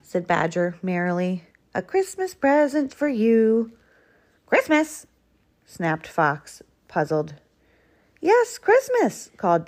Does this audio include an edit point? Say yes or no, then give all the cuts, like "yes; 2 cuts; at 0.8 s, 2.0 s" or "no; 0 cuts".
yes; 1 cut; at 2.9 s